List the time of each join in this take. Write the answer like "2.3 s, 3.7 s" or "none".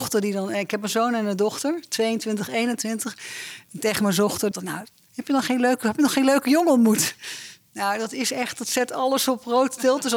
4.5 s